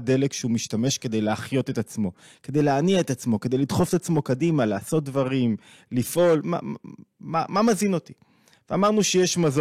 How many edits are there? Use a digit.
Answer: 0